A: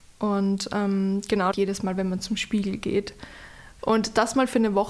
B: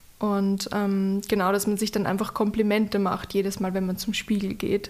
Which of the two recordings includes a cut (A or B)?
A